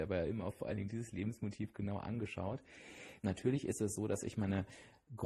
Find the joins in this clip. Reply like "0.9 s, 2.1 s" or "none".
3.2 s